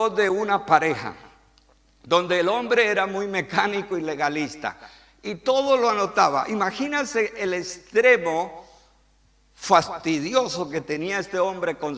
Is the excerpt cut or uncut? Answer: uncut